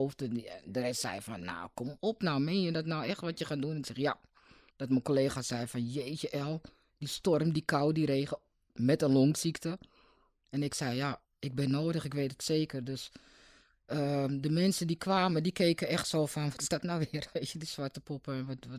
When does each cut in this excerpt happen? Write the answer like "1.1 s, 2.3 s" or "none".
4.7 s